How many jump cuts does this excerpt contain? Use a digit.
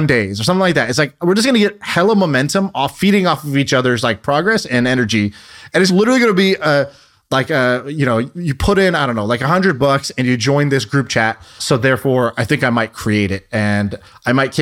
2